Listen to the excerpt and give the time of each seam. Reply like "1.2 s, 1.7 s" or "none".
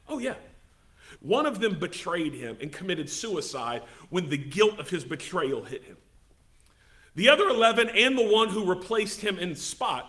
1.2 s